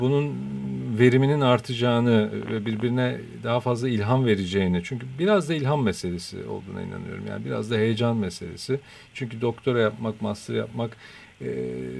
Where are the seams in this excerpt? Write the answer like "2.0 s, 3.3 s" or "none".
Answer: none